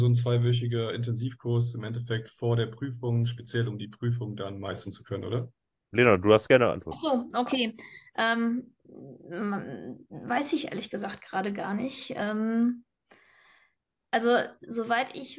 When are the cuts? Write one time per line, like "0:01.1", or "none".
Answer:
none